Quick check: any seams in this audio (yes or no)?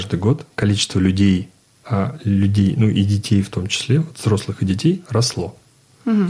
yes